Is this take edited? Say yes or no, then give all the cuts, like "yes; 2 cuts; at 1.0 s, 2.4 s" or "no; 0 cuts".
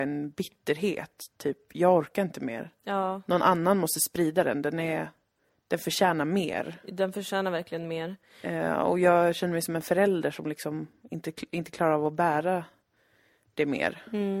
no; 0 cuts